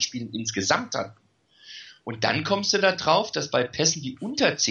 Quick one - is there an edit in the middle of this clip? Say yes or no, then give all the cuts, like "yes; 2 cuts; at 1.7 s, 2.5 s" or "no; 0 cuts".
no; 0 cuts